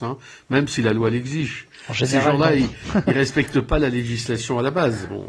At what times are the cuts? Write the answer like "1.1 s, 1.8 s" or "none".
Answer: none